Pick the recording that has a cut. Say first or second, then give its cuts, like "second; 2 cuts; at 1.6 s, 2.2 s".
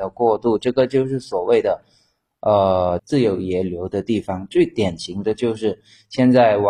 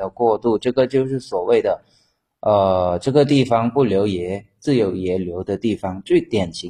first; 1 cut; at 3.0 s